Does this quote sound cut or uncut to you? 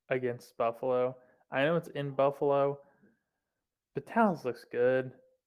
uncut